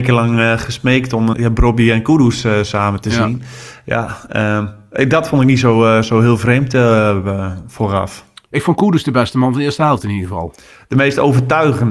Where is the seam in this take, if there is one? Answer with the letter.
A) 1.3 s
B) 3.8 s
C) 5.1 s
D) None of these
A